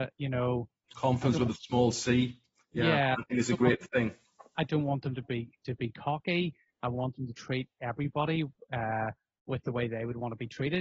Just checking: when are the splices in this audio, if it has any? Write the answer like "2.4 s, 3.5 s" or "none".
none